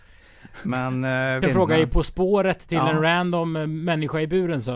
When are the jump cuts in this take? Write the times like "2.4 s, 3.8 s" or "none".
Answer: 1.4 s